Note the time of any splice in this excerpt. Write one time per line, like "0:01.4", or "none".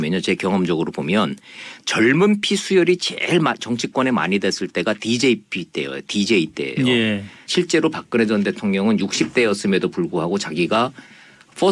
0:07.5

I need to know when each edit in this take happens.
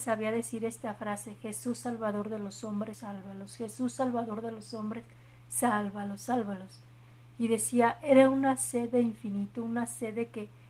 0:02.9

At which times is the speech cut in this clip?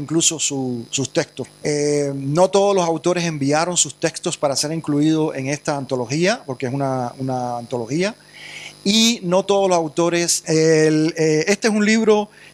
0:01.4
0:10.4

